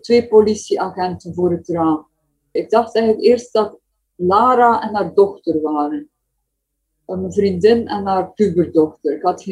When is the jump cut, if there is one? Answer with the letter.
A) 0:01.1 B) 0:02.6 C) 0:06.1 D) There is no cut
B